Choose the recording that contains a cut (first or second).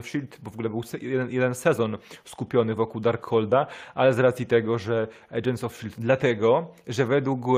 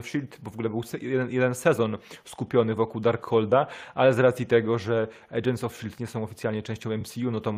first